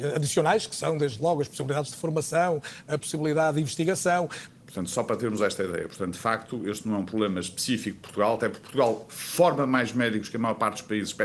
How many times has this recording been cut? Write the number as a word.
one